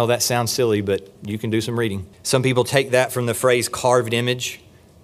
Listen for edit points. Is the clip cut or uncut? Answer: cut